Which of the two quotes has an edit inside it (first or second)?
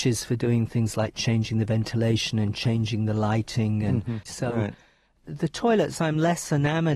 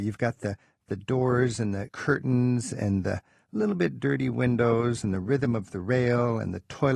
first